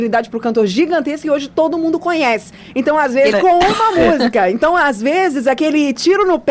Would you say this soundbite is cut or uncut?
cut